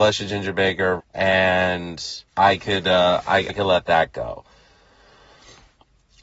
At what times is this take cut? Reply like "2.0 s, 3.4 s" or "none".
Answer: 1.0 s, 2.3 s, 3.5 s